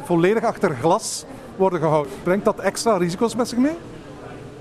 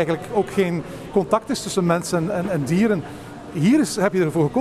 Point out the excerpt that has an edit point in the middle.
first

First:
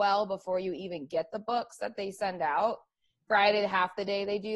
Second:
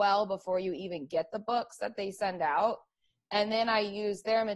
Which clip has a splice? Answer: first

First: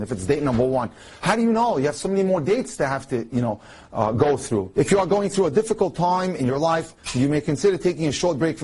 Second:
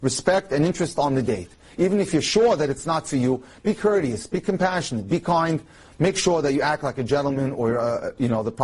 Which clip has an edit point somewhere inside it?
first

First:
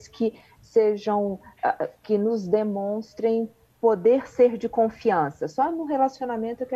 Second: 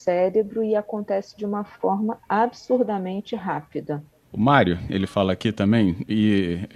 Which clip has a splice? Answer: second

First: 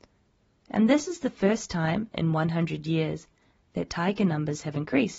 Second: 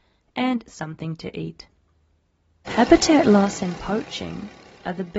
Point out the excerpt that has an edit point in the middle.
second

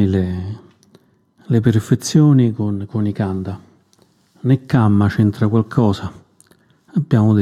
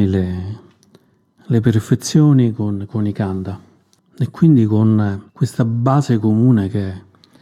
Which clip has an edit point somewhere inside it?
second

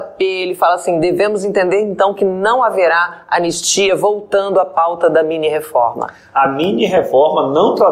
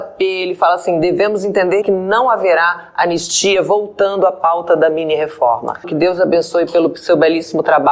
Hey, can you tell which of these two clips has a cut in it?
second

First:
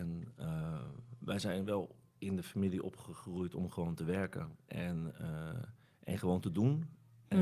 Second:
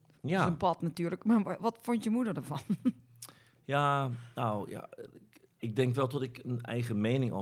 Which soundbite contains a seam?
second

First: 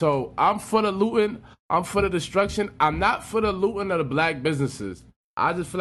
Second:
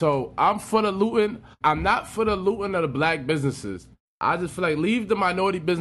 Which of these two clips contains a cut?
second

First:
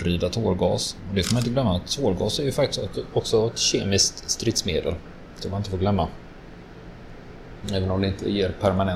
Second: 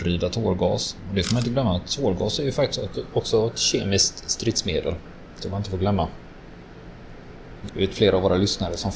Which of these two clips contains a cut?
second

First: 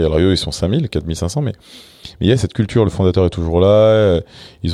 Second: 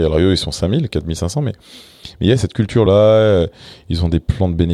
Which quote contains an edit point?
second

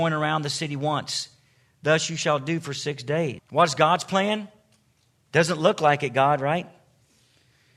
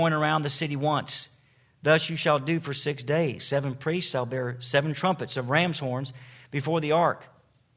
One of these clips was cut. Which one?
first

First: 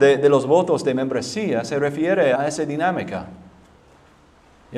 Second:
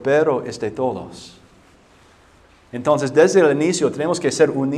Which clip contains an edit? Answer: first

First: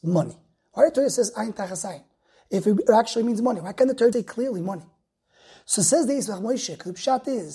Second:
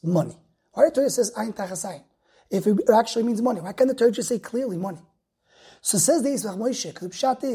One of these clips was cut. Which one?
first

